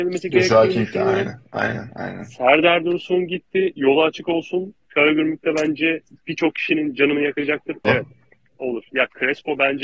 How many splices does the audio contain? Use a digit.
2